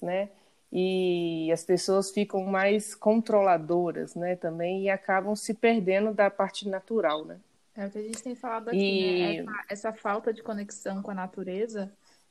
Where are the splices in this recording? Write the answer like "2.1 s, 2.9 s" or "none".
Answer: 7.6 s